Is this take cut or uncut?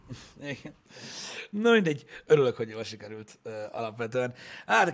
cut